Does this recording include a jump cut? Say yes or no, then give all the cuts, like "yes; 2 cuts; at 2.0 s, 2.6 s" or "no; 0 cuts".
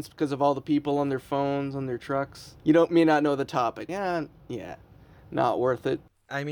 yes; 2 cuts; at 2.6 s, 3.9 s